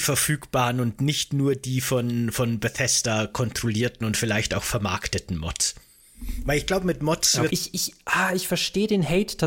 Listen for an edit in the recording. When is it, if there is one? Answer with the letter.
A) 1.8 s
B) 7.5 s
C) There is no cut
B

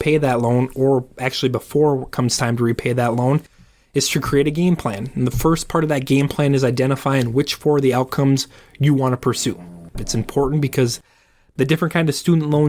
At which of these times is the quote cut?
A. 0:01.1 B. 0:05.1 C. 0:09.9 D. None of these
C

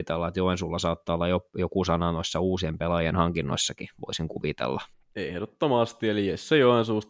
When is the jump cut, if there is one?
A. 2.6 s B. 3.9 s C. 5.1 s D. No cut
C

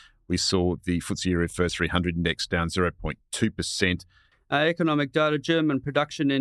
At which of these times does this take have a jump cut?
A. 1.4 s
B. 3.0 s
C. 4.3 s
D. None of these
C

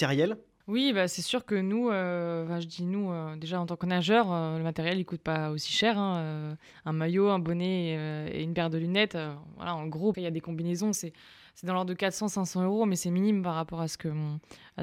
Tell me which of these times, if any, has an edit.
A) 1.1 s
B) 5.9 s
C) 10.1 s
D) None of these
C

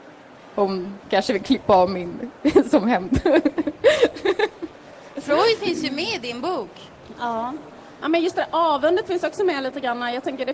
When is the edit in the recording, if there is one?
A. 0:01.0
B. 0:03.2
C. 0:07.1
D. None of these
D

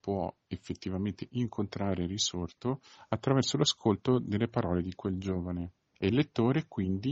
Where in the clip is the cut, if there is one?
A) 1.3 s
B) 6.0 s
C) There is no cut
B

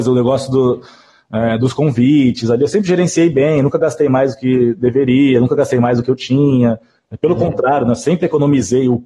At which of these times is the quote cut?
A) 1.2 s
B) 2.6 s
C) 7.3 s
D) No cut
D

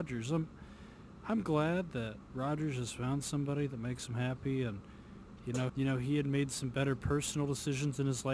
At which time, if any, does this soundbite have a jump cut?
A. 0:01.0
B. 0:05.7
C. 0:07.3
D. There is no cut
B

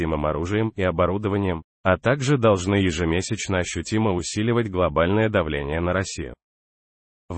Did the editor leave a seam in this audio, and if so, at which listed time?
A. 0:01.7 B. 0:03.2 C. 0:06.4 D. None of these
A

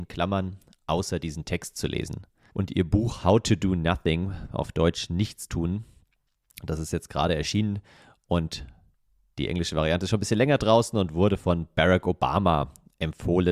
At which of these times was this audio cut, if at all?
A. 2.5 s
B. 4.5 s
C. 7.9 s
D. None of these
A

